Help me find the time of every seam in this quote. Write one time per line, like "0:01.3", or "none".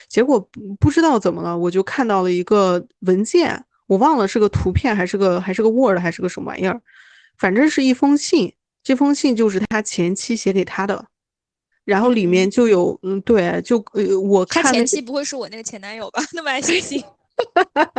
none